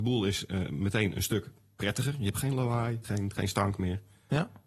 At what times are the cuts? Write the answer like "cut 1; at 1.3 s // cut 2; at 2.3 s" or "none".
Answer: cut 1; at 3.0 s